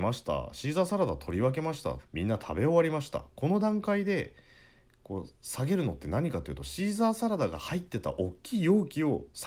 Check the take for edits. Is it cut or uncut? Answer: cut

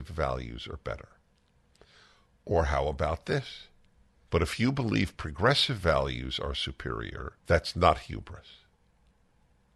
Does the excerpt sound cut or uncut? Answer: cut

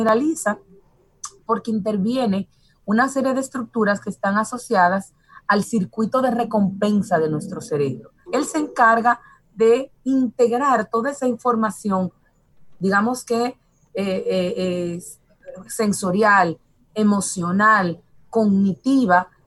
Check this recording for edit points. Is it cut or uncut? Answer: cut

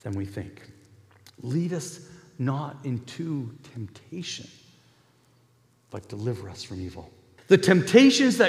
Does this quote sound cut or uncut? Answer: cut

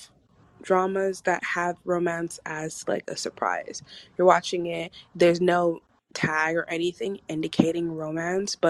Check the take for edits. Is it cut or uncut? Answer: uncut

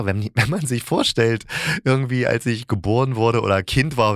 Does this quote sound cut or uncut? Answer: uncut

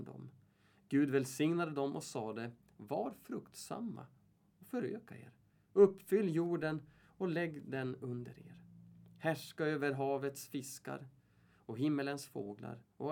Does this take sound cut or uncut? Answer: uncut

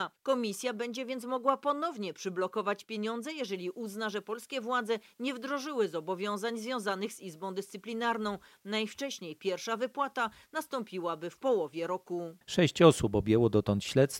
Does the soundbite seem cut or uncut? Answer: cut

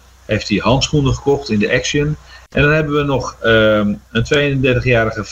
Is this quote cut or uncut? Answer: cut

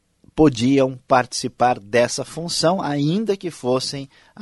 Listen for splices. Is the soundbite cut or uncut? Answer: uncut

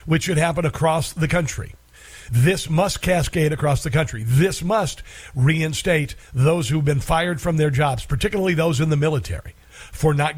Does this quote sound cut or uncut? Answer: uncut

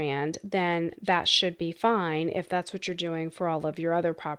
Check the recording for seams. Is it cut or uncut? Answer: uncut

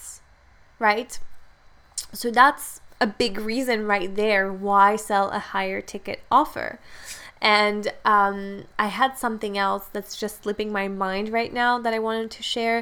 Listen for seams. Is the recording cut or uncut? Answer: uncut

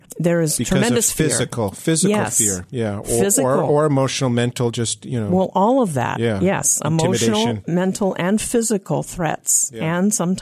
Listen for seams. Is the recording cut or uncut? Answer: uncut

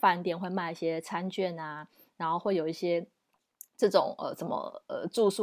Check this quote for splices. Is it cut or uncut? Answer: uncut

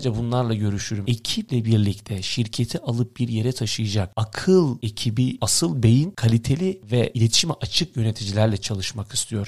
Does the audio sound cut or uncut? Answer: cut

